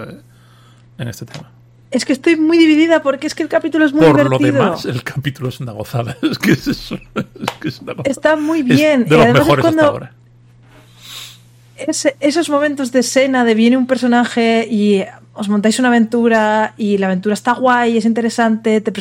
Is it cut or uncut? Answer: uncut